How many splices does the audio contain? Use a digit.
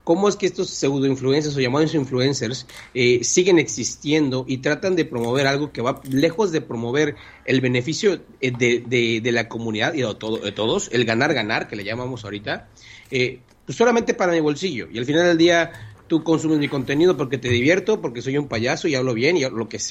0